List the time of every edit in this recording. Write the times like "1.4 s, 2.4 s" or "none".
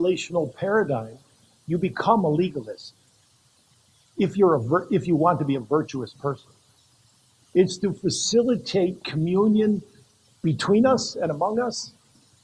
7.4 s